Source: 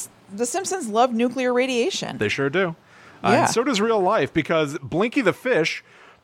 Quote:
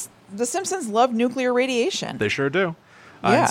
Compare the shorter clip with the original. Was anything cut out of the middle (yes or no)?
no